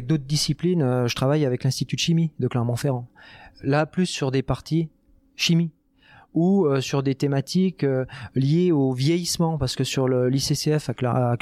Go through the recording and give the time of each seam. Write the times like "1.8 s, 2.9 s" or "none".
none

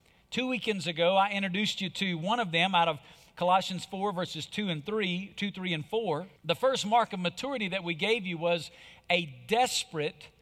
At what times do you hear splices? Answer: 6.4 s

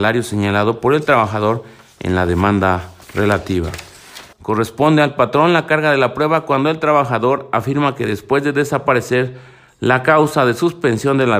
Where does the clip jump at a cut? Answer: 4.3 s

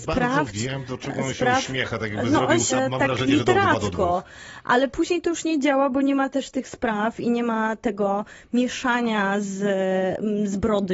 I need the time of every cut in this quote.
2.7 s

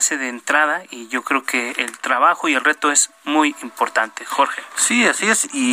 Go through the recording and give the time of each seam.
none

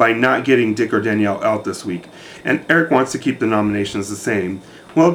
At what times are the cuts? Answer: none

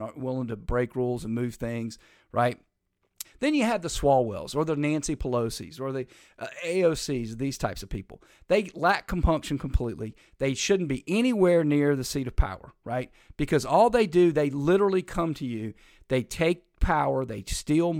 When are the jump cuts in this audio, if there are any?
3.2 s

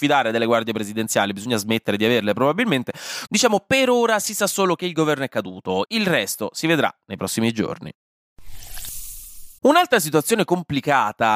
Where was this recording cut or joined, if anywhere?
3.3 s, 5.9 s, 9.6 s

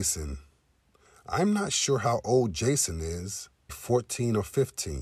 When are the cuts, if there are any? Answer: 3.7 s

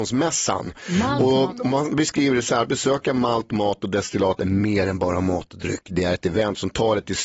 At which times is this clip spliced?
none

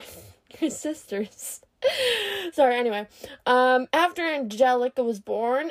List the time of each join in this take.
1.7 s

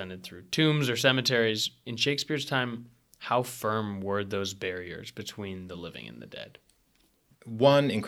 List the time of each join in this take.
none

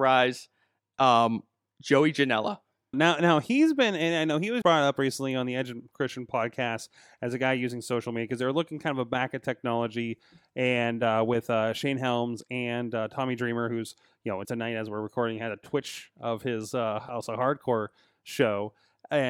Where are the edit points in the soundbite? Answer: 2.9 s, 4.6 s, 14.4 s

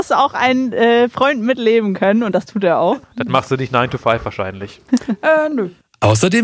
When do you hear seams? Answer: none

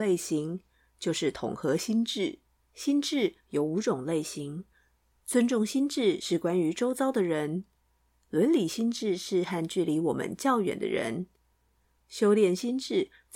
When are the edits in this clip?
2.6 s

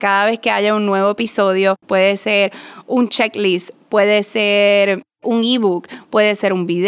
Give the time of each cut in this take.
1.8 s

